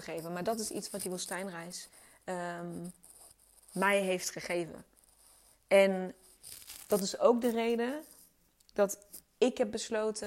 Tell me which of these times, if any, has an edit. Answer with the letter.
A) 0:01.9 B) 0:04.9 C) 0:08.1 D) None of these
D